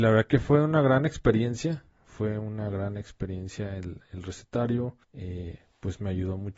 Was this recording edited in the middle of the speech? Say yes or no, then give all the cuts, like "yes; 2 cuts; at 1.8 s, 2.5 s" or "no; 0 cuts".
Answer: yes; 1 cut; at 5.0 s